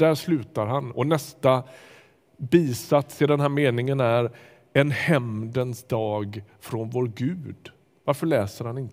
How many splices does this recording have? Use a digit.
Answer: 0